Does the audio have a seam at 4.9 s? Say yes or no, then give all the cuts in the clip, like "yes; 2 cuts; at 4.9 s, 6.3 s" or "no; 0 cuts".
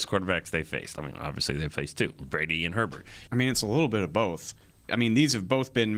yes; 2 cuts; at 3.3 s, 4.9 s